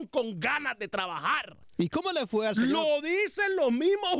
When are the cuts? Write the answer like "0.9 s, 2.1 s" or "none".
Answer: none